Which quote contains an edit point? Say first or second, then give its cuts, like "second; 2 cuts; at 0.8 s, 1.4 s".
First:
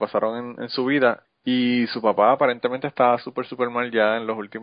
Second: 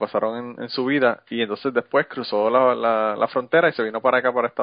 first; 1 cut; at 1.2 s